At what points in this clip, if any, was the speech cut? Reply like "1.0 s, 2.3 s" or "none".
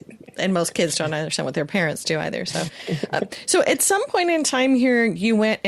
none